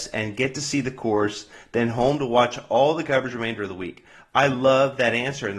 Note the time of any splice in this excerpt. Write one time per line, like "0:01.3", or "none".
none

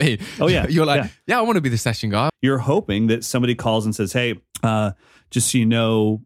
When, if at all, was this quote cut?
0:02.3
0:04.5

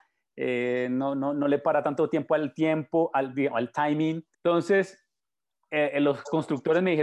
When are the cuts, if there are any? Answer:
0:04.3

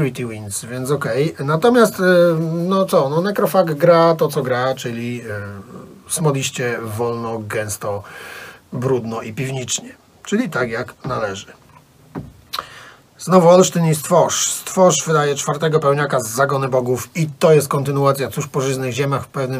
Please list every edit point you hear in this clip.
0:08.6

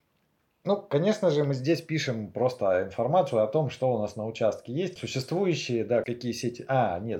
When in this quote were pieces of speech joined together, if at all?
0:05.0
0:06.0

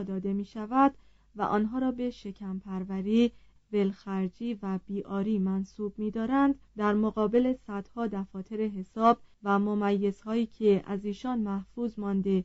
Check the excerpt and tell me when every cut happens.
0:03.6
0:06.7
0:09.3

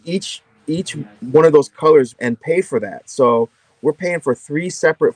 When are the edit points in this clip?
0:02.1

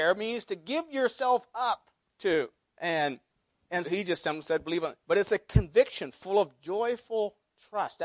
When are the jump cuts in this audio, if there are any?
0:02.6
0:03.8

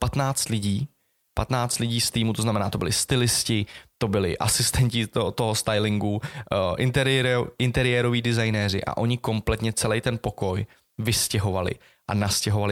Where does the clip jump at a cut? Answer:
none

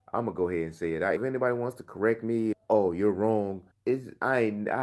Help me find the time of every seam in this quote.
0:01.2
0:02.5
0:03.7

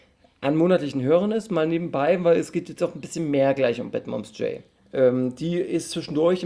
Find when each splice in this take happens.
0:04.8

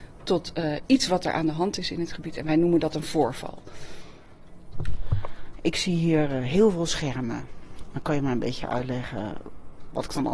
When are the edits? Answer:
none

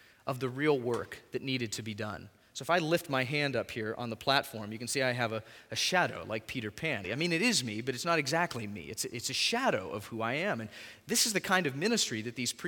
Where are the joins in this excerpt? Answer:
0:07.0

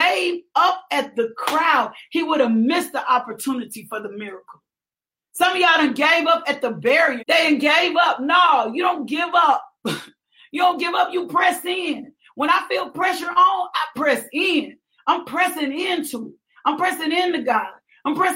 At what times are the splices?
0:07.2

